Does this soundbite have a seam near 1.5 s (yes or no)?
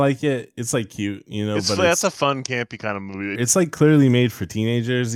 no